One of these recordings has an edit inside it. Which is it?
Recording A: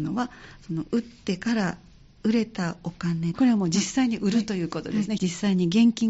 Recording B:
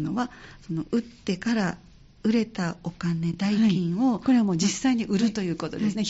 A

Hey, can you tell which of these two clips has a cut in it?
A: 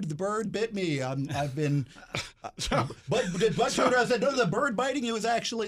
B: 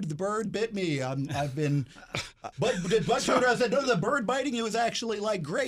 B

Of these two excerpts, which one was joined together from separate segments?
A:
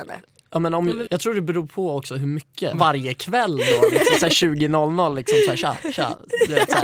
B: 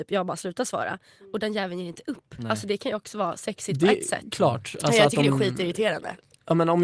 A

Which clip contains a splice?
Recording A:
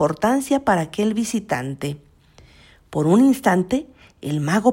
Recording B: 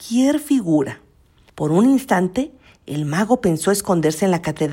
B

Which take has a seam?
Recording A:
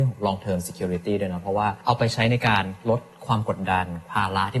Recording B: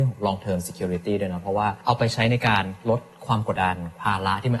B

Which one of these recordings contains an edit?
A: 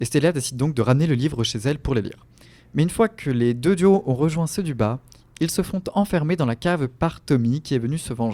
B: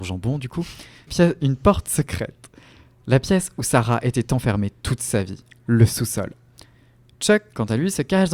B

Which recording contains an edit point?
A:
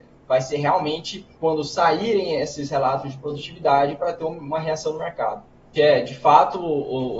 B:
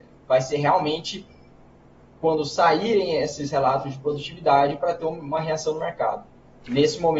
A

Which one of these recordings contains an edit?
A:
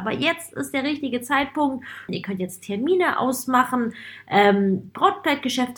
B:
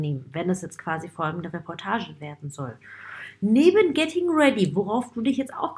A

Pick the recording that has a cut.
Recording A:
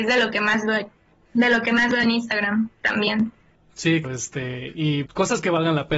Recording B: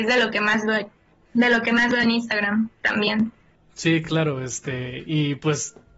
A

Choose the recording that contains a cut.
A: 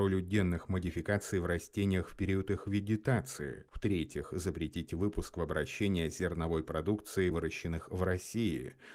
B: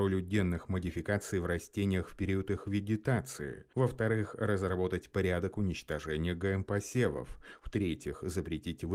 A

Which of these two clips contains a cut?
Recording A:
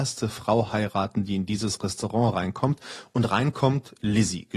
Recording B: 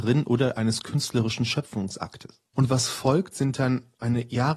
B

